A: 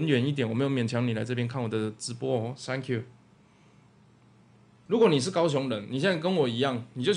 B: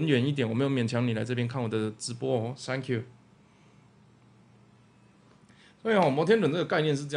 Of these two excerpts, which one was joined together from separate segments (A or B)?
A